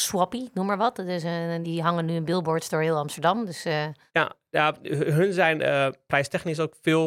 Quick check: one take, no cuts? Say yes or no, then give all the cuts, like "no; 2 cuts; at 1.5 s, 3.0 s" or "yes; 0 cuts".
no; 1 cut; at 1.6 s